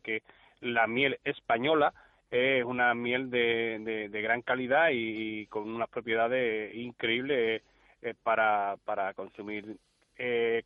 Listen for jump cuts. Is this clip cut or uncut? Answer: uncut